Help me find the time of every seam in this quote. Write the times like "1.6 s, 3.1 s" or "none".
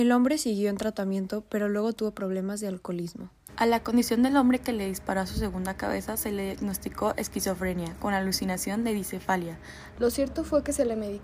3.5 s, 10.0 s

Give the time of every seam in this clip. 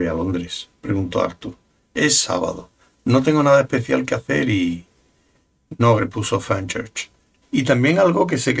6.0 s, 7.4 s

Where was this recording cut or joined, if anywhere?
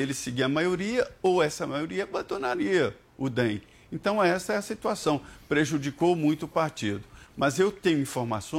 none

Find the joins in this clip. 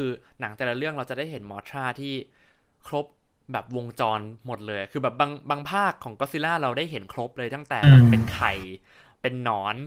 none

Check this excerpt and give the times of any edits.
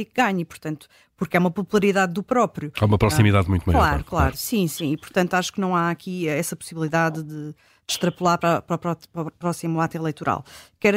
none

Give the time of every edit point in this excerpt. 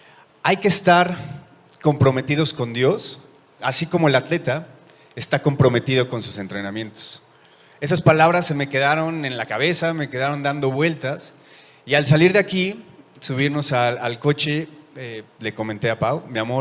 3.6 s

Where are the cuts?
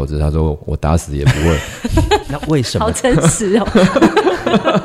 2.2 s

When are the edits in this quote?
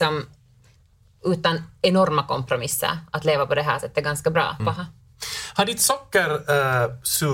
4.6 s

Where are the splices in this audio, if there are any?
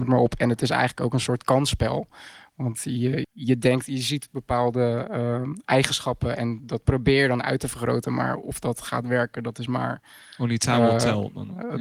3.2 s

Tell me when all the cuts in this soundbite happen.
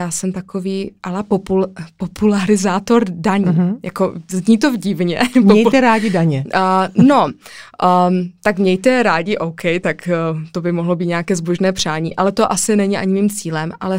none

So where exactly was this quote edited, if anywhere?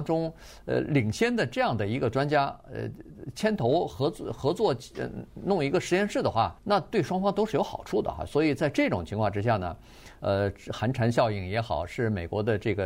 6.6 s, 10.2 s

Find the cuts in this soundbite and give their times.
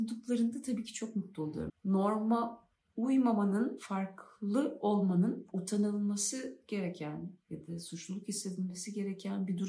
1.7 s

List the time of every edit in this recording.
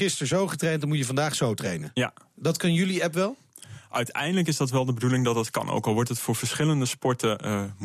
none

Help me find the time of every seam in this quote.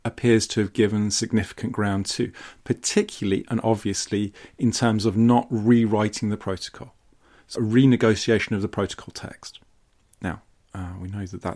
7.6 s

